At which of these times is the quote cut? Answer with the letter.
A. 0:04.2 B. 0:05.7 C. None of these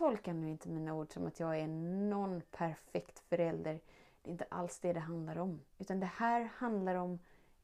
B